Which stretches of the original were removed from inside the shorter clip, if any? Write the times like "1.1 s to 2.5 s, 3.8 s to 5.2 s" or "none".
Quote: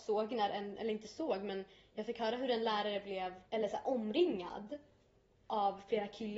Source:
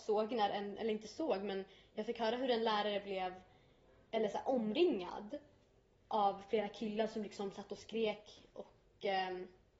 3.4 s to 4.1 s